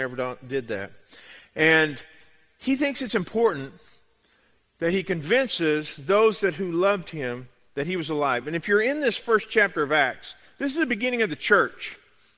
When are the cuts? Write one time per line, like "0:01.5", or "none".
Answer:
none